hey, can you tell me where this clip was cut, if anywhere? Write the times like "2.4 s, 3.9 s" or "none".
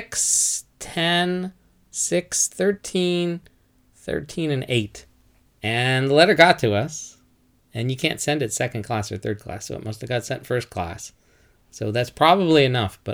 5.5 s